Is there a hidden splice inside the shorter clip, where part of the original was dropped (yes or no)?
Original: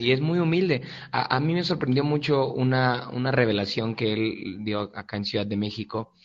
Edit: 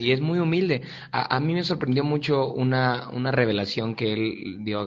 no